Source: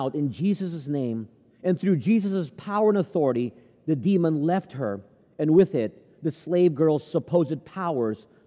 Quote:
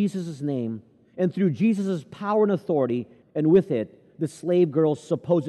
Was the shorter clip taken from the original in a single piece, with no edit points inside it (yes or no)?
no